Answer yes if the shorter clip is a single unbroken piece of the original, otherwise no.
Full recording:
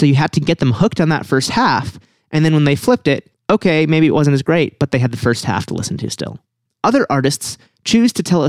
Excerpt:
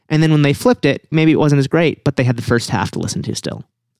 no